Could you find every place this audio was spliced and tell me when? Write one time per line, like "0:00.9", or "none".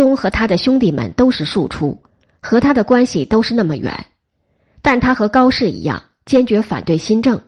none